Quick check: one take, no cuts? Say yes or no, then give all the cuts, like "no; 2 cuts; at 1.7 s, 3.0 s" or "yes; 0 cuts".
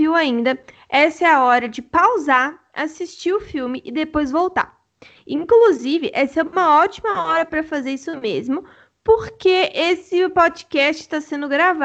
yes; 0 cuts